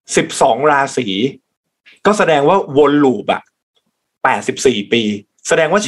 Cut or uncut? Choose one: uncut